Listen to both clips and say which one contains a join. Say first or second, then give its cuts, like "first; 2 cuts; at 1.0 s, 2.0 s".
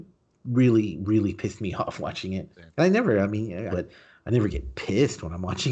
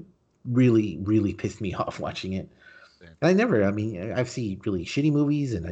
first; 2 cuts; at 2.5 s, 3.7 s